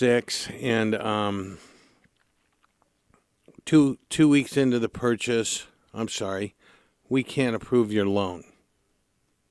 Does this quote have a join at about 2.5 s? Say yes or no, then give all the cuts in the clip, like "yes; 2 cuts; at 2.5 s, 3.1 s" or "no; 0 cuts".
no; 0 cuts